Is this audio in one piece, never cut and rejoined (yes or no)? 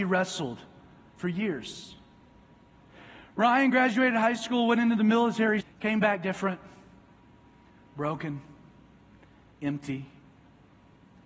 no